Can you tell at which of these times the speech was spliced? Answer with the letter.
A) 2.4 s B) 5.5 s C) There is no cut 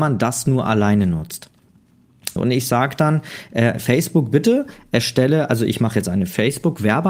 A